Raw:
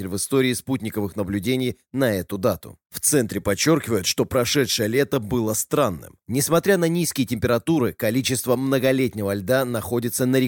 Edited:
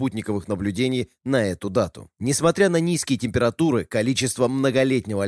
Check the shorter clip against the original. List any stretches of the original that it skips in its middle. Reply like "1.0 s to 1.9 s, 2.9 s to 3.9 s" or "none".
2.8 s to 6.2 s